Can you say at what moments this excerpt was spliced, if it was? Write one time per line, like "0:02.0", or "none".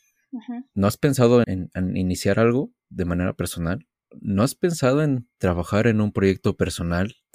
0:01.4
0:04.1